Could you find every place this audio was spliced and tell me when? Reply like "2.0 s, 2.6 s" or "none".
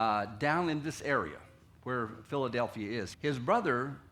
3.1 s